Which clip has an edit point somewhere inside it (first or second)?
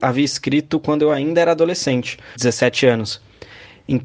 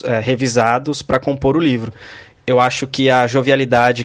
first